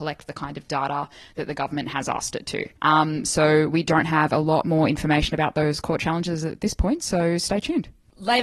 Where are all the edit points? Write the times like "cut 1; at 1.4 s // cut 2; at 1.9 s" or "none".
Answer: cut 1; at 2.8 s